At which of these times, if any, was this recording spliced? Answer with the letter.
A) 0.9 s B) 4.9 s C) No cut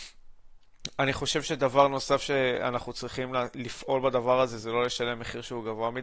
C